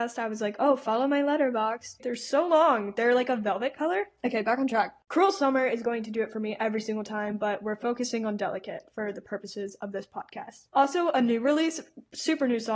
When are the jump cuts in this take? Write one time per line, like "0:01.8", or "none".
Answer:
0:02.0
0:10.7